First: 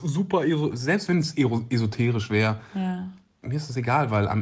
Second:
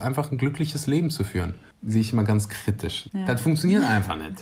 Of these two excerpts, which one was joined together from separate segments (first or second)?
second